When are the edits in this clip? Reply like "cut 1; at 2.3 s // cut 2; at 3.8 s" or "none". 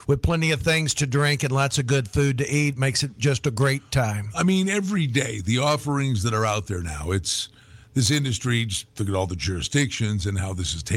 none